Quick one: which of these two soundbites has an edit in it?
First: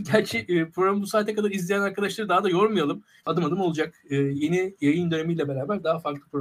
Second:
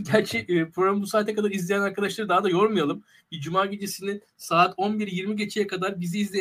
first; 1 cut; at 3.2 s

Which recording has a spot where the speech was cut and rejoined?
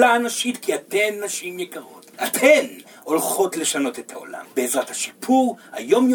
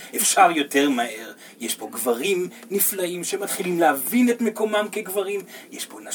first; 2 cuts; at 2.1 s, 4.4 s

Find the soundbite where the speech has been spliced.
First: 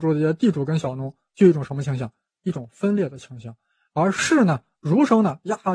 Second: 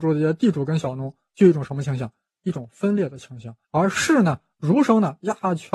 second; 1 cut; at 3.6 s

